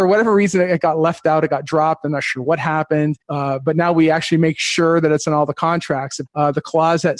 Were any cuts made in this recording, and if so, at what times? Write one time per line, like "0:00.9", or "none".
0:03.2
0:06.3